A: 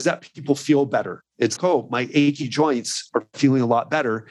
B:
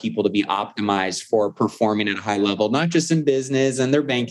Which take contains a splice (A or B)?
A